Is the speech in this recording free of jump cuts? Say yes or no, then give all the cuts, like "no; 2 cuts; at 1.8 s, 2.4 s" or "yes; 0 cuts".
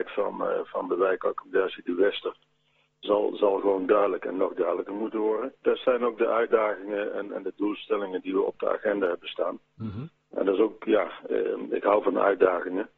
no; 1 cut; at 5.6 s